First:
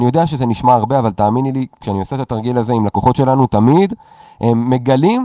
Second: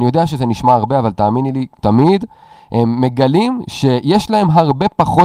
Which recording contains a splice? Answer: second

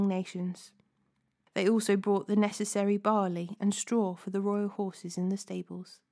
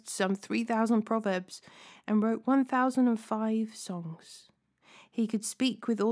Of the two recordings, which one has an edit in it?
first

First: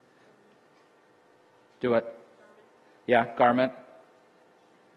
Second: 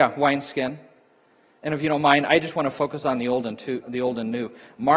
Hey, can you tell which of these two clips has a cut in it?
second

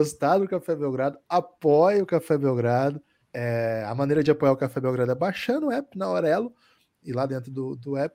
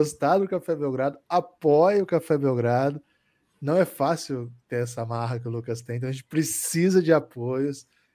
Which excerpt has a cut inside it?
first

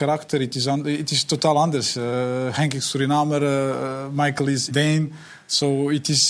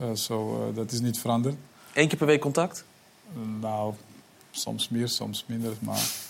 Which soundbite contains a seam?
first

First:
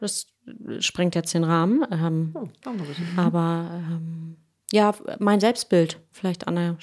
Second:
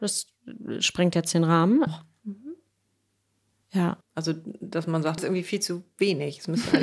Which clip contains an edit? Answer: second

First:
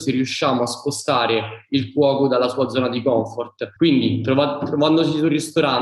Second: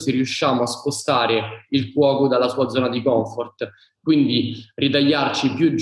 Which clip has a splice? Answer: first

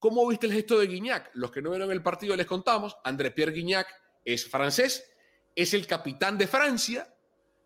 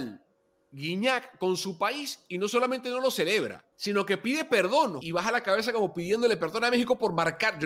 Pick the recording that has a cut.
second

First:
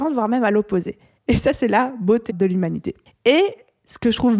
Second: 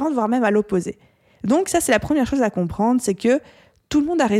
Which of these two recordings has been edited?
first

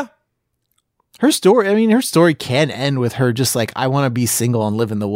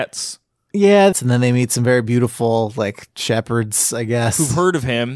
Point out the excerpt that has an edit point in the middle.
second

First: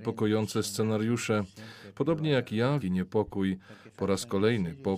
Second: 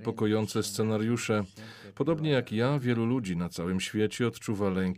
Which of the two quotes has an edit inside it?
first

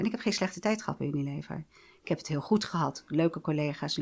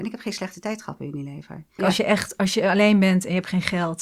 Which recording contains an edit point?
second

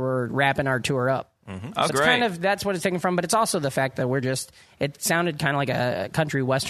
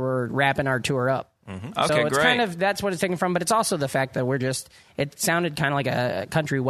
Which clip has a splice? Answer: first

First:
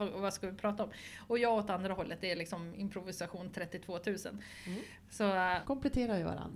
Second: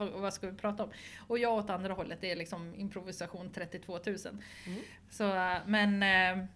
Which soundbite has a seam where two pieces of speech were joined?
first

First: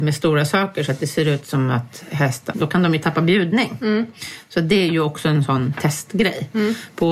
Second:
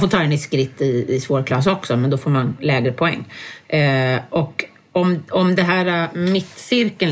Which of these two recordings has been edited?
first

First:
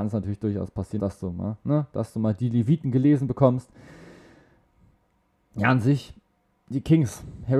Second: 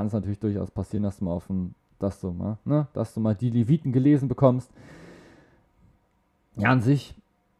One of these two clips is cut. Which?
first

